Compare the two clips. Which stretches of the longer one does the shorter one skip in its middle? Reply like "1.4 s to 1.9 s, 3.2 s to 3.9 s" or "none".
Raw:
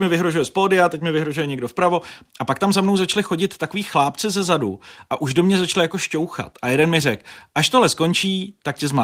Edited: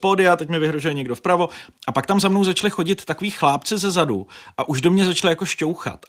none